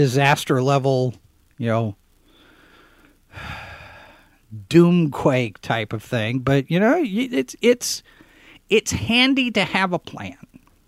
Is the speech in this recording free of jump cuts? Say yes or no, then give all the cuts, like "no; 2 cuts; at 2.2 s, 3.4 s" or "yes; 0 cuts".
yes; 0 cuts